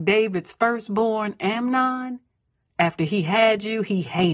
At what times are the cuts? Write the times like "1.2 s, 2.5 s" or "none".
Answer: none